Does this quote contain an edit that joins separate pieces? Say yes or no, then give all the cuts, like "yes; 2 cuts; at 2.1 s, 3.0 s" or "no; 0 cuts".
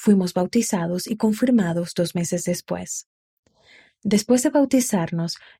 no; 0 cuts